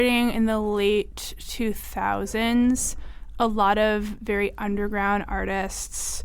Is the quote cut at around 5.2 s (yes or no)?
no